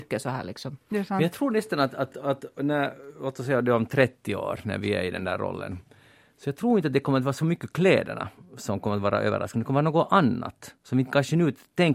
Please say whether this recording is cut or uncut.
uncut